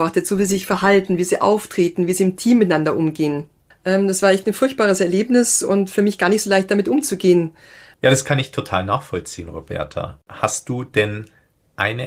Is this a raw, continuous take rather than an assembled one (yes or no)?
no